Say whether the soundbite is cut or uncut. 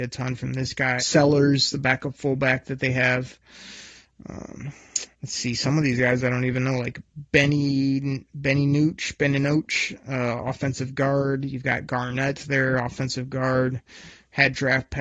cut